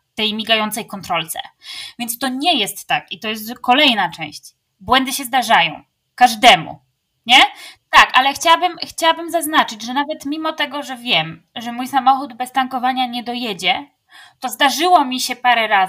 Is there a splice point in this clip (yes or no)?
yes